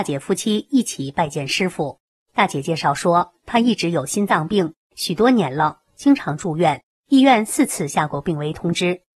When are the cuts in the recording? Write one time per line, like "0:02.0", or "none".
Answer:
none

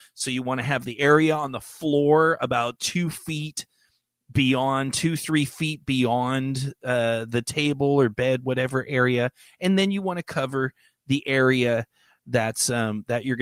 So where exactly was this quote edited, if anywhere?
none

